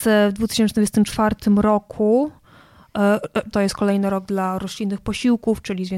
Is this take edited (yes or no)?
yes